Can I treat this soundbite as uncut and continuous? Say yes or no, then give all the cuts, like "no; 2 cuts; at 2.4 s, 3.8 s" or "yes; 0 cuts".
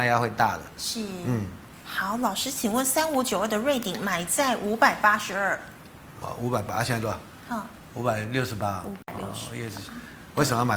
yes; 0 cuts